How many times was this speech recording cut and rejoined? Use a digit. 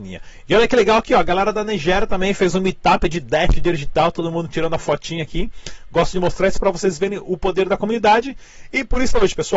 0